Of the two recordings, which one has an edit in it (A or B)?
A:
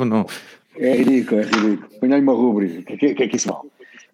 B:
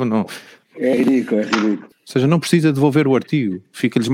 B